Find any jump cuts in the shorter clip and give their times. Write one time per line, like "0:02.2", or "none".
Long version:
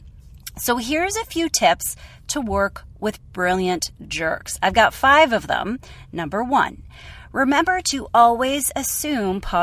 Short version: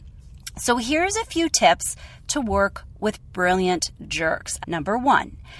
0:04.6